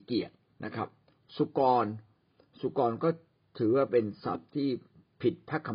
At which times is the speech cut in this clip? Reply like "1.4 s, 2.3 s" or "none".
none